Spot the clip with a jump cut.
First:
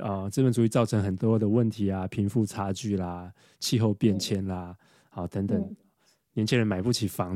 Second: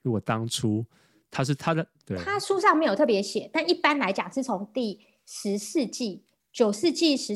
second; 1 cut; at 2.0 s

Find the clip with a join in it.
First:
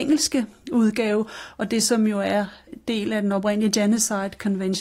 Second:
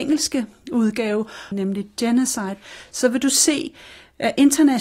second; 1 cut; at 1.5 s

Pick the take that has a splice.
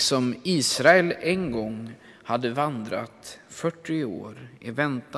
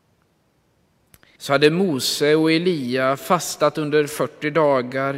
second; 1 cut; at 1.4 s

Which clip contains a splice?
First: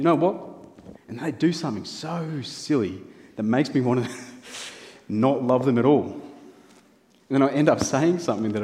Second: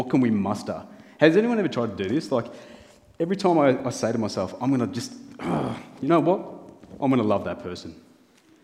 first; 1 cut; at 0.9 s

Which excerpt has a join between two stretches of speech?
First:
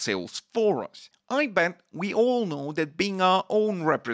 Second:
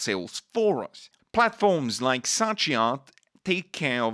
second; 1 cut; at 1.2 s

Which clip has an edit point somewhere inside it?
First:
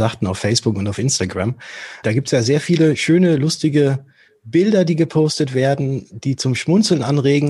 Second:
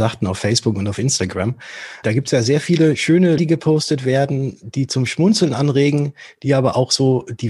second; 1 cut; at 3.4 s

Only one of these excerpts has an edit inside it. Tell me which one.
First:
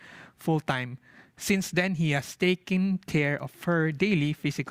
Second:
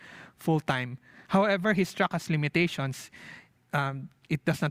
second; 1 cut; at 1.3 s

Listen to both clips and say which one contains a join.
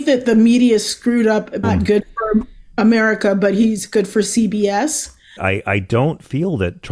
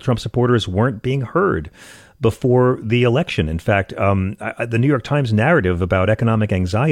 first; 2 cuts; at 1.6 s, 5.4 s

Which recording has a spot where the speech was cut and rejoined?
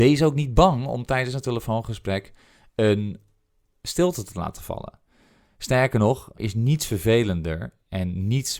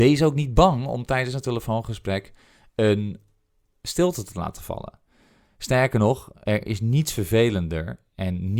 first; 1 cut; at 6.4 s

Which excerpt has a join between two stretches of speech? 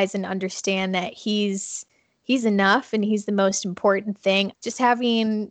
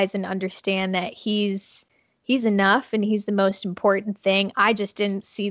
first; 1 cut; at 4.5 s

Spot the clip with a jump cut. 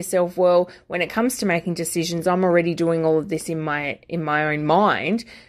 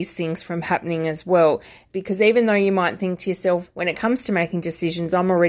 second; 2 cuts; at 1.9 s, 3.7 s

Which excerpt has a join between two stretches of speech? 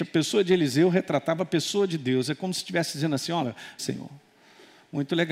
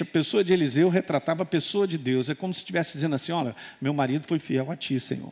first; 1 cut; at 3.8 s

